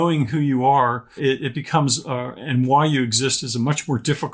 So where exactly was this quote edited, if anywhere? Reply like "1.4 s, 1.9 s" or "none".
1.2 s

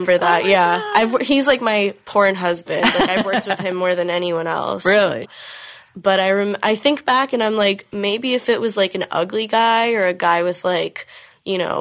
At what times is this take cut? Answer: 5.2 s

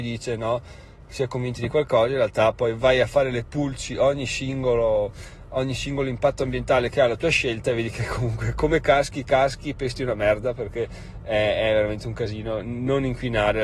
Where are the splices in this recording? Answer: none

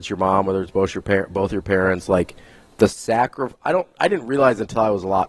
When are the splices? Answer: none

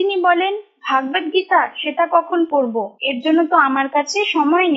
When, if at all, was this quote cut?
3.0 s

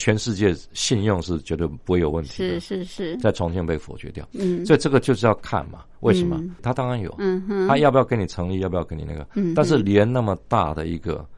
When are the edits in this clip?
6.6 s

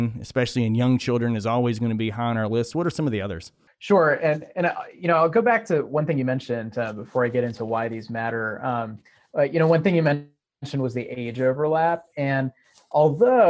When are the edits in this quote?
none

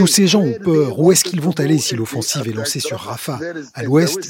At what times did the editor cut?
none

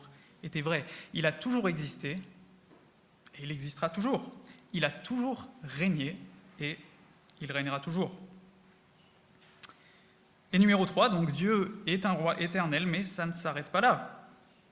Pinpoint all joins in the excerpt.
none

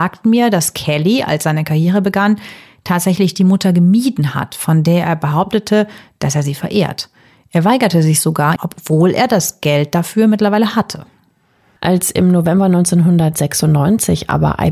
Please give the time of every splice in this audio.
8.6 s, 11.8 s

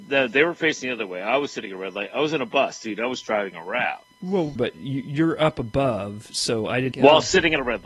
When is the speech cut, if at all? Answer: 4.6 s, 6.9 s

